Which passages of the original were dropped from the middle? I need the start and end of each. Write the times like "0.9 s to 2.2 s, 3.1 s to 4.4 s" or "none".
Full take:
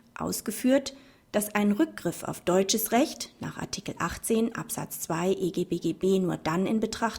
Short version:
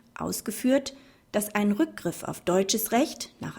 none